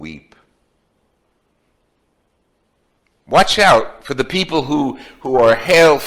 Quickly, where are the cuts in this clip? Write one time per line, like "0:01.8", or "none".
none